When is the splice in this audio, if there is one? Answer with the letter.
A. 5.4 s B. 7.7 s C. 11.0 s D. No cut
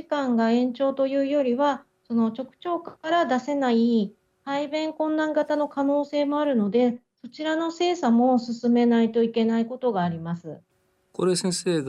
D